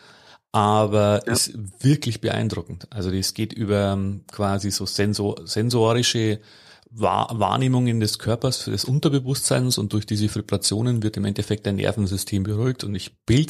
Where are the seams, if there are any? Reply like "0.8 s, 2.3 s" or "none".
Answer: none